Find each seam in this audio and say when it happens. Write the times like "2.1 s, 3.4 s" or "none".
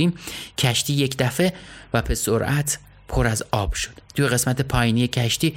4.1 s